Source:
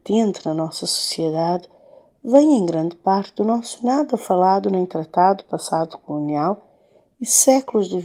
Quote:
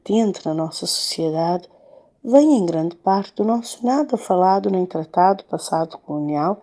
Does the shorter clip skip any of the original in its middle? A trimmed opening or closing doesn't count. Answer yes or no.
no